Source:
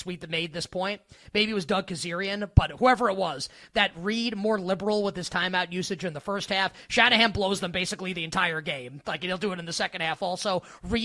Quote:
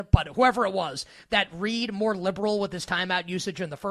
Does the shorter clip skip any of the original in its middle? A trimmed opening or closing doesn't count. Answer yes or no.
no